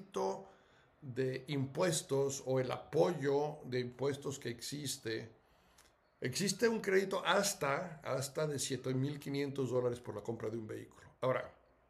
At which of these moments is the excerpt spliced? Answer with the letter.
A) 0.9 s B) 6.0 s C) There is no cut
B